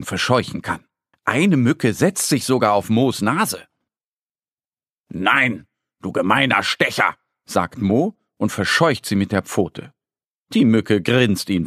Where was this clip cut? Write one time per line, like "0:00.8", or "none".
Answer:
0:01.1